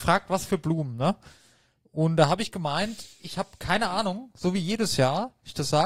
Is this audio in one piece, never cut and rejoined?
yes; 0 cuts

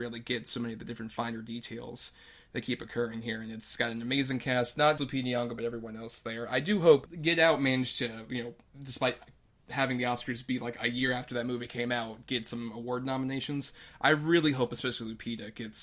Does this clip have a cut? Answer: yes; 1 cut; at 5.0 s

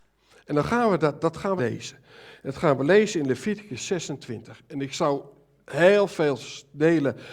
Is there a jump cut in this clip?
yes; 1 cut; at 1.6 s

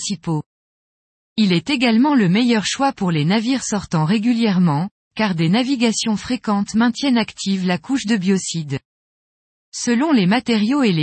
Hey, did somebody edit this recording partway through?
yes; 1 cut; at 1.2 s

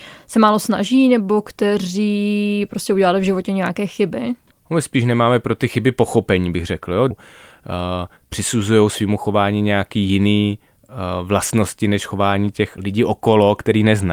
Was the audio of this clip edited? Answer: yes; 1 cut; at 7.1 s

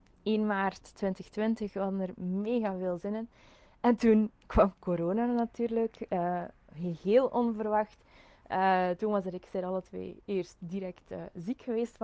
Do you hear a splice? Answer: no; 0 cuts

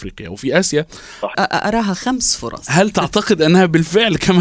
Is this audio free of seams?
no; 1 cut; at 1.3 s

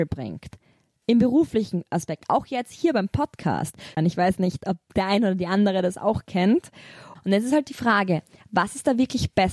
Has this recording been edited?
yes; 2 cuts; at 4.0 s, 7.2 s

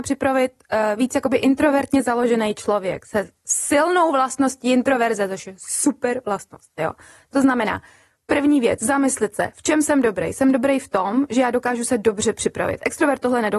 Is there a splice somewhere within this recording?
no; 0 cuts

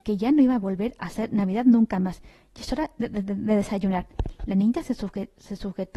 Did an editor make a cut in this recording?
no; 0 cuts

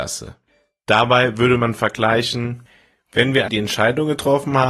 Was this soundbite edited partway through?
yes; 1 cut; at 3.5 s

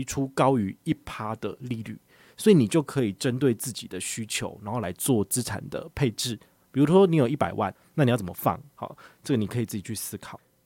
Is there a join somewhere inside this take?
yes; 1 cut; at 8.7 s

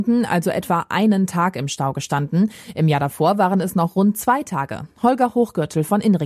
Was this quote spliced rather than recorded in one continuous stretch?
no; 0 cuts

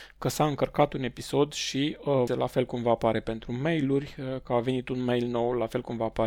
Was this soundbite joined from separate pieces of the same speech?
yes; 1 cut; at 2.3 s

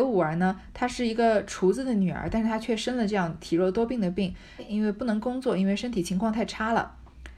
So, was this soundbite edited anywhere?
yes; 1 cut; at 4.6 s

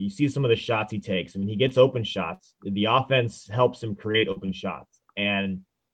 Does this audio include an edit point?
no; 0 cuts

